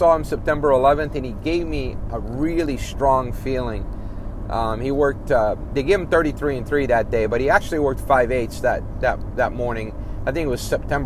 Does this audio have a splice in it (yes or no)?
no